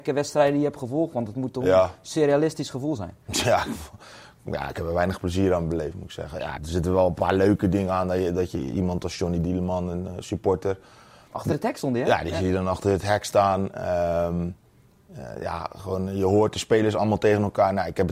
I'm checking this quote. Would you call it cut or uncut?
cut